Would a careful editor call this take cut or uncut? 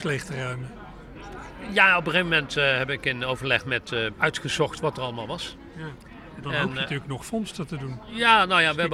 cut